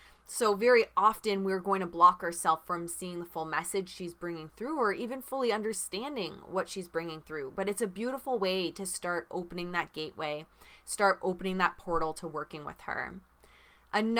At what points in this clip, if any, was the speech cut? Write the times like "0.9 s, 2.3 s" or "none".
none